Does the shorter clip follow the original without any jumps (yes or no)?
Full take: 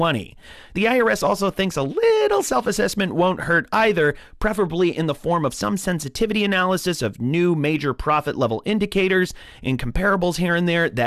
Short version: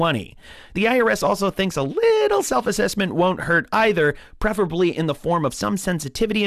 yes